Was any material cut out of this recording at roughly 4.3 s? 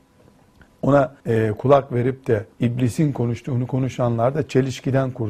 no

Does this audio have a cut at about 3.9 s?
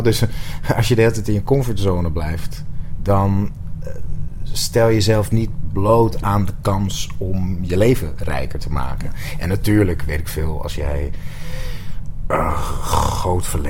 no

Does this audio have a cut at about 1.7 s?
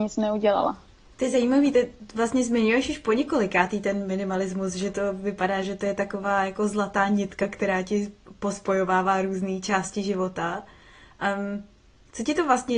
no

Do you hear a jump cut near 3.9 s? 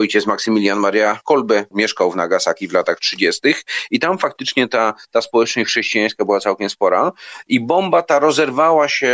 no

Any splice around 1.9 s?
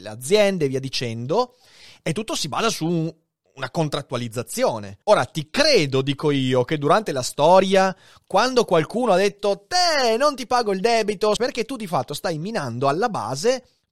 no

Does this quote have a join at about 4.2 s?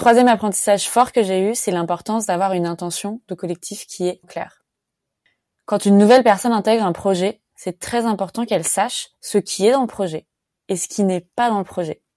yes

